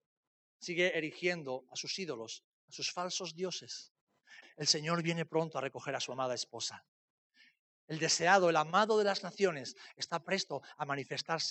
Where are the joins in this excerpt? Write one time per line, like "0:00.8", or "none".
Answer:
0:04.4